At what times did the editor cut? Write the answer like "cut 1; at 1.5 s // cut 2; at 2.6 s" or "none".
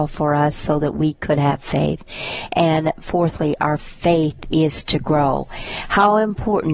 none